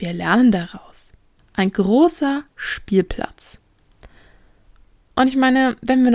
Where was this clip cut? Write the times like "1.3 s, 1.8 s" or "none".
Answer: 1.4 s

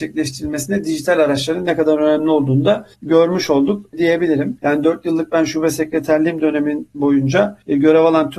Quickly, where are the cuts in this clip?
4.6 s

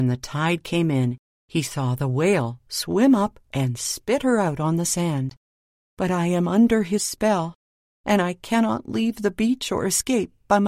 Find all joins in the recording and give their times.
5.8 s

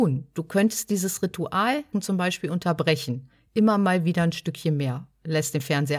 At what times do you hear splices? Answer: 1.9 s

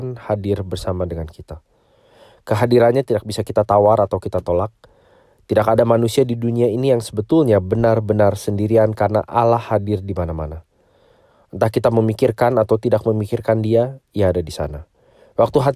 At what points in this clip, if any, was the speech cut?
none

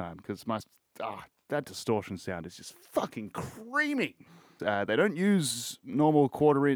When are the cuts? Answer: 4.6 s

